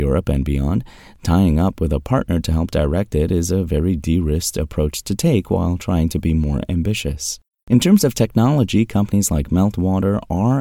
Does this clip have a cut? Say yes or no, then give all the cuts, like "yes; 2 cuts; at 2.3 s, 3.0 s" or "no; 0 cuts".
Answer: no; 0 cuts